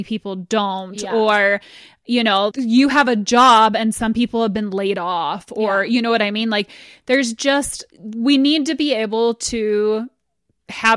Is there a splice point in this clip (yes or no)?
yes